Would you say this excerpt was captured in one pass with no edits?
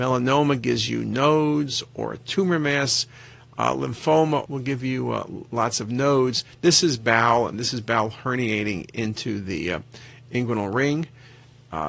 no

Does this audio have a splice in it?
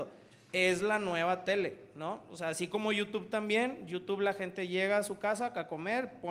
no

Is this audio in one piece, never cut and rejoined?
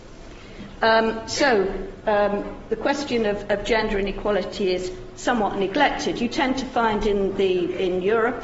yes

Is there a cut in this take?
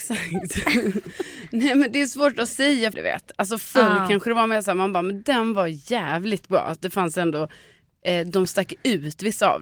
yes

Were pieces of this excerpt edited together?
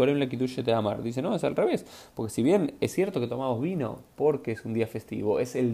no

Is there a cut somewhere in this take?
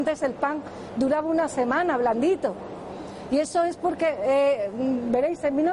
no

